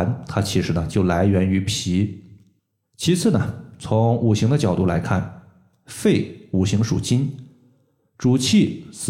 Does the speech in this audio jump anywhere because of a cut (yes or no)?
no